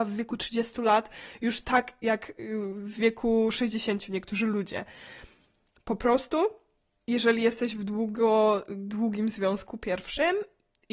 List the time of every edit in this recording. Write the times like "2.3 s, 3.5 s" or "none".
none